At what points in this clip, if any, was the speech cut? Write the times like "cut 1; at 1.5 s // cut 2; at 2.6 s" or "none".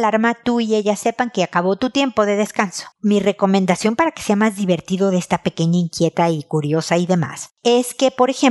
cut 1; at 2.9 s

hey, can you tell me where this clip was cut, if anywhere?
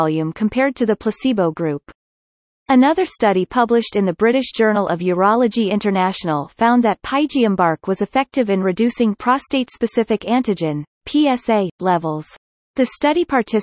cut 1; at 12.5 s

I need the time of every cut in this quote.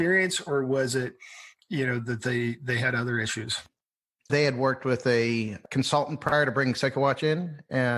cut 1; at 4.3 s

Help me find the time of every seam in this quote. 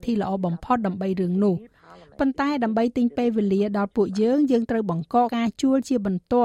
cut 1; at 5.3 s

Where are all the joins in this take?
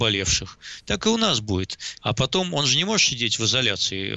cut 1; at 2.0 s

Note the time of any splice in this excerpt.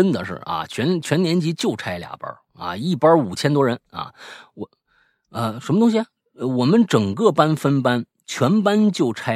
none

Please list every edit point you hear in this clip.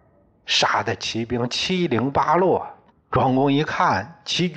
cut 1; at 2.9 s

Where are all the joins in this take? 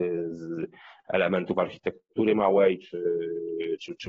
none

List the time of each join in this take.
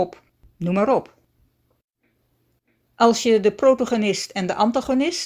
none

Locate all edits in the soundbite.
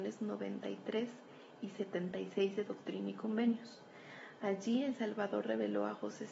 none

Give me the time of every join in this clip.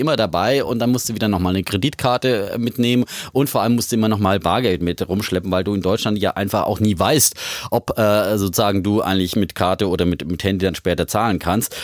none

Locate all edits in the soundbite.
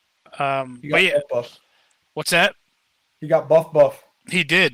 none

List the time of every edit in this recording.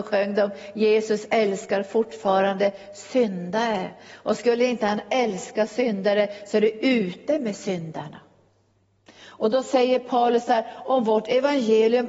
none

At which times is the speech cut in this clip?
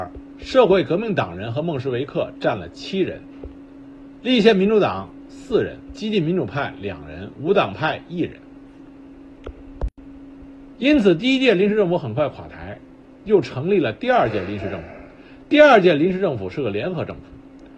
cut 1; at 10.7 s

